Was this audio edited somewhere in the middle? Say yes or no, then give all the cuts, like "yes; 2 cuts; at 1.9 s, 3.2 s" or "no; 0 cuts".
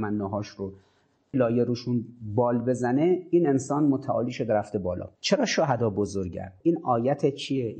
yes; 3 cuts; at 1.3 s, 5.2 s, 6.6 s